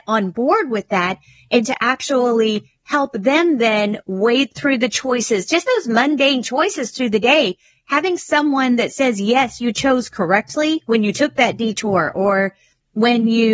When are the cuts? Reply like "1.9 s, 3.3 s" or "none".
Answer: none